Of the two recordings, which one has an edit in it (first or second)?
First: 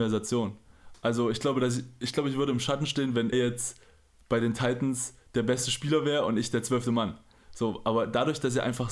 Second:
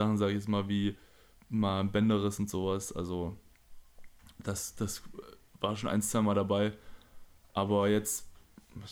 first